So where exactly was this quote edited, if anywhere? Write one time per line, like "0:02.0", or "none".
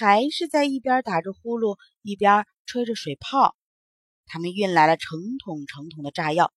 0:04.2